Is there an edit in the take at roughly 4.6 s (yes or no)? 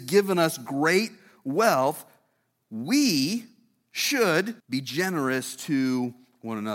yes